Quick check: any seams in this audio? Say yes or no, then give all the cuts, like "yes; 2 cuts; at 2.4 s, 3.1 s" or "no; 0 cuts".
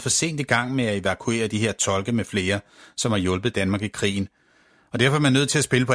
no; 0 cuts